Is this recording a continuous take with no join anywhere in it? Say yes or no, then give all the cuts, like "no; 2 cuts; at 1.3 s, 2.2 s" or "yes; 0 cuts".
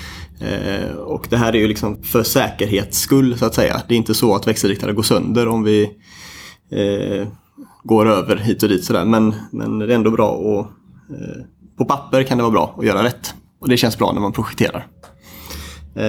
no; 1 cut; at 2.0 s